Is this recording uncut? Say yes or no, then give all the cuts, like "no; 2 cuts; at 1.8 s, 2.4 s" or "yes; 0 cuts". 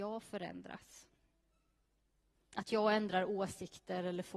yes; 0 cuts